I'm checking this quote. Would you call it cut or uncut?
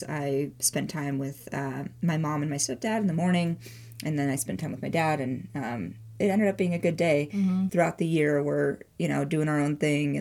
cut